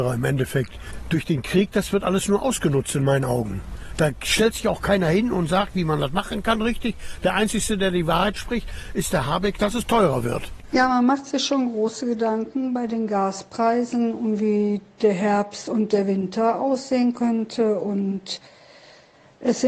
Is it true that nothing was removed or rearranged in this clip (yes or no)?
yes